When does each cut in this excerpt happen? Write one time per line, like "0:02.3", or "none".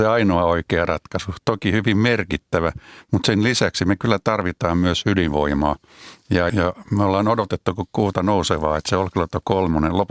0:06.5